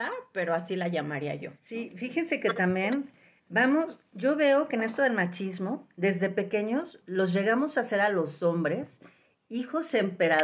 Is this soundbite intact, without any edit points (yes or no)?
no